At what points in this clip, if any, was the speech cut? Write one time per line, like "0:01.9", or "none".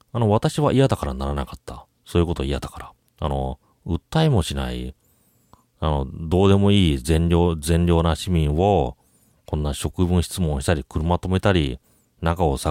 0:03.1